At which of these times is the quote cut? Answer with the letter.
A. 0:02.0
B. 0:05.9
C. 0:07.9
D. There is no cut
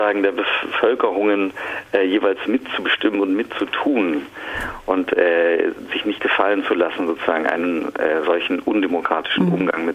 D